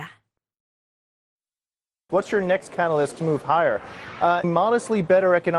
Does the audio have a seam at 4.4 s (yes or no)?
yes